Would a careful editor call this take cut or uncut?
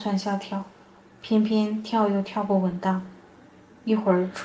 uncut